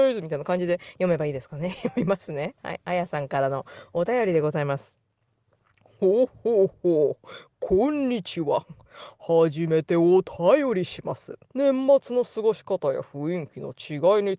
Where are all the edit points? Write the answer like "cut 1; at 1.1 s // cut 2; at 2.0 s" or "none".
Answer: cut 1; at 11.5 s